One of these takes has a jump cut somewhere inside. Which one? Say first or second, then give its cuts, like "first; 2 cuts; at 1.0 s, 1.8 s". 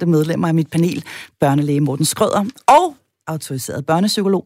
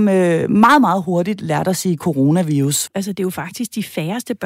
second; 1 cut; at 2.9 s